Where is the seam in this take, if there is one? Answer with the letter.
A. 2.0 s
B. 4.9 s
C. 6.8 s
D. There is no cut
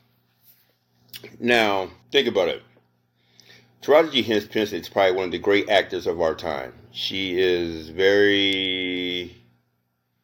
A